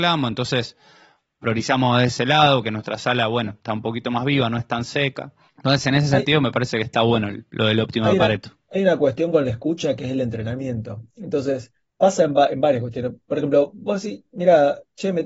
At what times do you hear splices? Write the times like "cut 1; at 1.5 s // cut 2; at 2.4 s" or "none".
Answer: none